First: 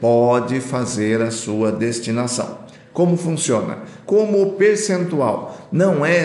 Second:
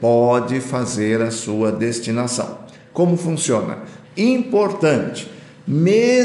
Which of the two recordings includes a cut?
second; 1 cut; at 4.0 s

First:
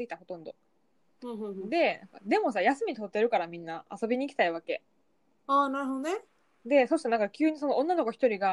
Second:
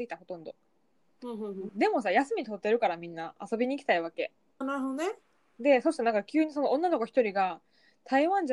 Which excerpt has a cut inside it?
second; 2 cuts; at 1.7 s, 4.6 s

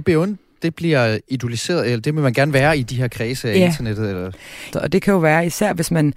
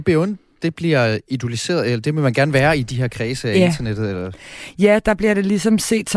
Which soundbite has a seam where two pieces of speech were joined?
first; 1 cut; at 4.7 s

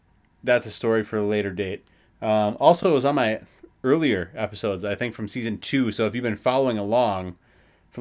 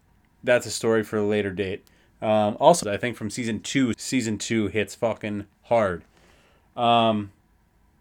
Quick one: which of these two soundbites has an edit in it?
second; 2 cuts; at 2.8 s, 3.9 s

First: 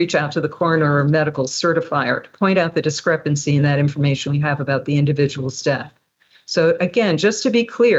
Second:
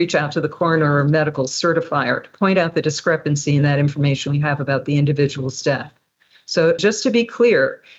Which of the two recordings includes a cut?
second; 1 cut; at 6.8 s

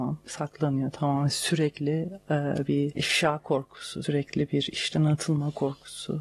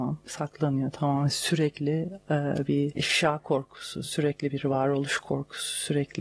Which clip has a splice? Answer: first; 1 cut; at 4.0 s

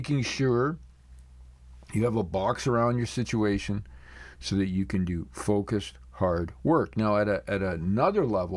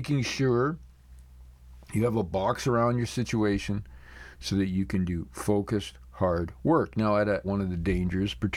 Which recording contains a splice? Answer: second; 1 cut; at 7.4 s

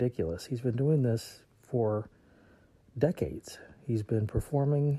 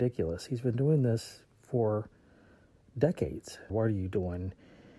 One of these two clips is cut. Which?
second; 1 cut; at 3.7 s

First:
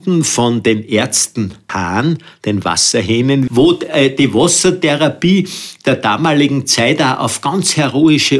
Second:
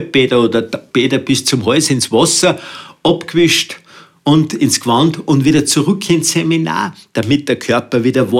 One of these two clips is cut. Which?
first; 2 cuts; at 1.7 s, 3.5 s

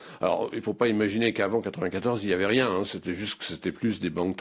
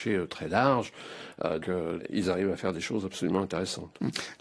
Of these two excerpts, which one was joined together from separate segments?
second; 1 cut; at 1.6 s

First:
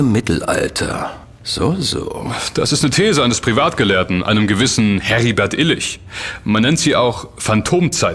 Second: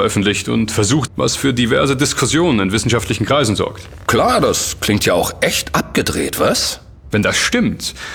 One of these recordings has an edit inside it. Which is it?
second; 2 cuts; at 1.1 s, 7.1 s

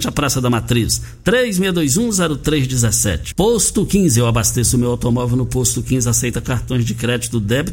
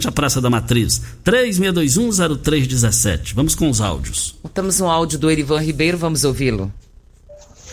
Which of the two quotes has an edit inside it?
first; 1 cut; at 3.3 s

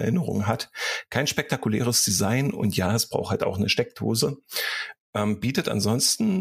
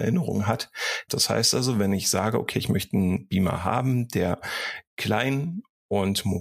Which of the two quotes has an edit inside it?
second; 1 cut; at 1.1 s

